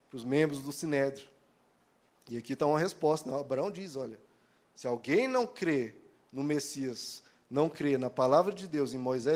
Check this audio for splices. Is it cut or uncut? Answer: uncut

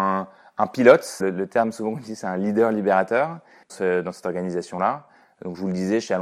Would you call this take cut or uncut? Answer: cut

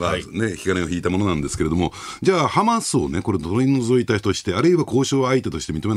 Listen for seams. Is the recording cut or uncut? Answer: uncut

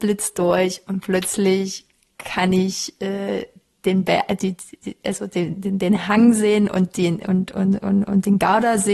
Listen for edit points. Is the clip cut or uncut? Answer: uncut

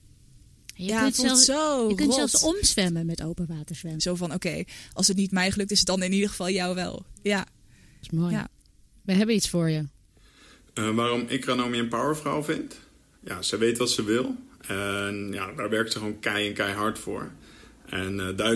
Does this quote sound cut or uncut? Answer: cut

